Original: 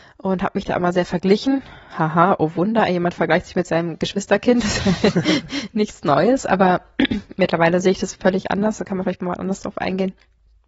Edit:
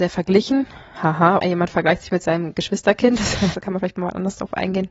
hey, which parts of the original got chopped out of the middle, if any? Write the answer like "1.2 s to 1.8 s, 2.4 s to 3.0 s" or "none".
2.4 s to 2.9 s, 5.0 s to 8.8 s